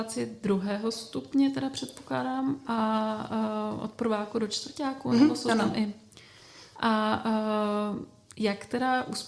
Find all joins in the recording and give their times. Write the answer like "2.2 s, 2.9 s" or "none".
none